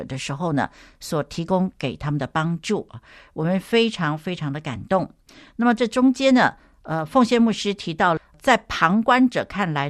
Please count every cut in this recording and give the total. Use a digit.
0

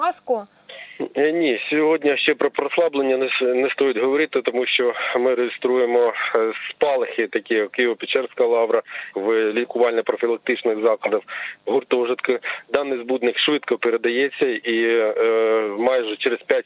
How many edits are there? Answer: 1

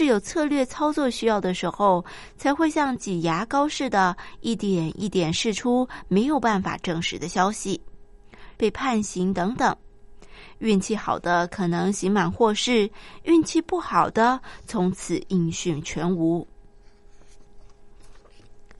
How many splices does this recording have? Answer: 1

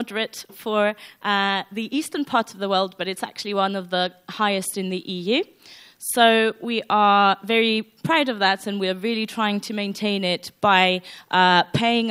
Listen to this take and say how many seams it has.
0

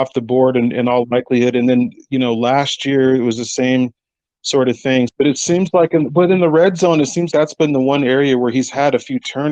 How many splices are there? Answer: 2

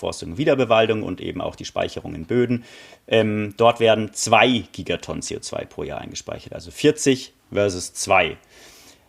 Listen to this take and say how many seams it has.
0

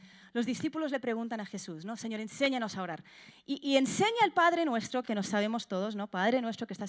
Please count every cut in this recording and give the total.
0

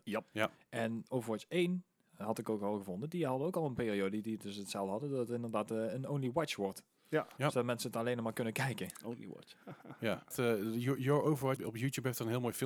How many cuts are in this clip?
2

